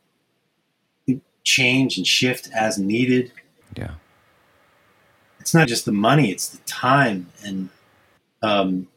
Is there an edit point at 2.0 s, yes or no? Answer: no